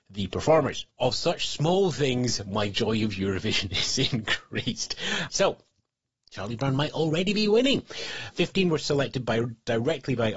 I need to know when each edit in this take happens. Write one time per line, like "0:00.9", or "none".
0:00.9
0:05.3
0:08.3